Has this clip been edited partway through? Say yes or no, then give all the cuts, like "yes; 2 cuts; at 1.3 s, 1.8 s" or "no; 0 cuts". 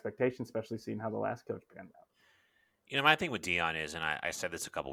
no; 0 cuts